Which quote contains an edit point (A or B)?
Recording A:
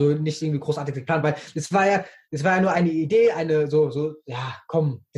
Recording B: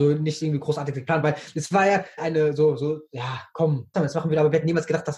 B